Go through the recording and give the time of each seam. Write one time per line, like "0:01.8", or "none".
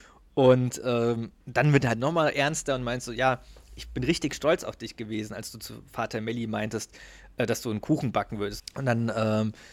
0:01.4
0:08.6